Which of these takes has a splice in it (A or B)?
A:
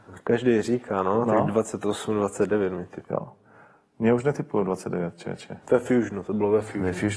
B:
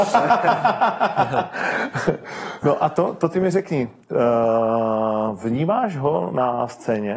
A